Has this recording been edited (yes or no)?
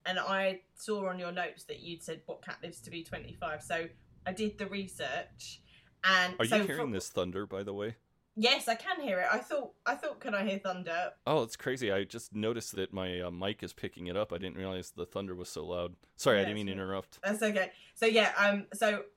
yes